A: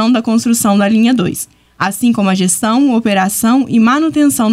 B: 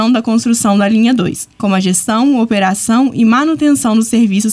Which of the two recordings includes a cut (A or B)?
B